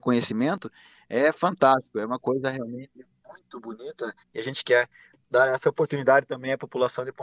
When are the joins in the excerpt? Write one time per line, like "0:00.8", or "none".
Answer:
0:04.2